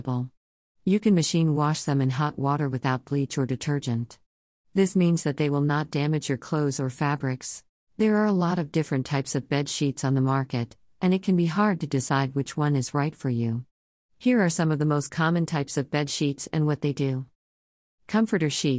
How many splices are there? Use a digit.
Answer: 1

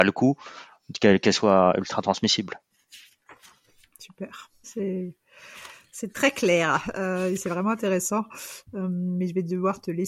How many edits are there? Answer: 1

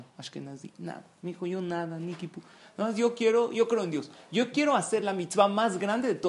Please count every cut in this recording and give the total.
0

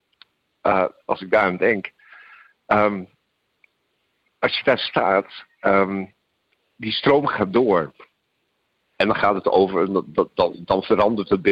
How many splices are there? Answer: 1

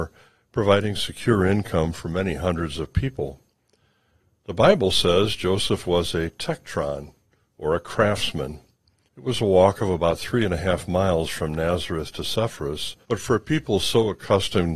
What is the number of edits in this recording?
2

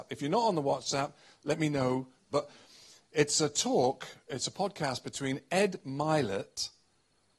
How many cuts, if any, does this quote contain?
1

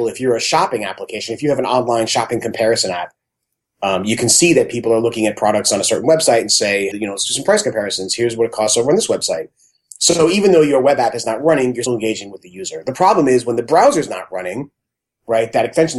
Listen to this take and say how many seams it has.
2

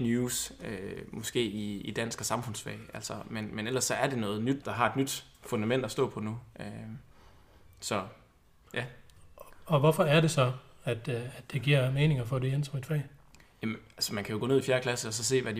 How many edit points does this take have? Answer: 1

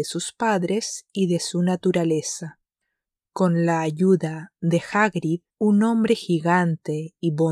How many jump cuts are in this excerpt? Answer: 2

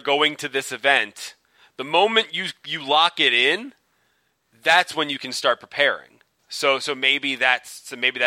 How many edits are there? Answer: 1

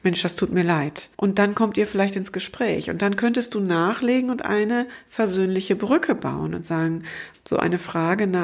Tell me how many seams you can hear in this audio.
2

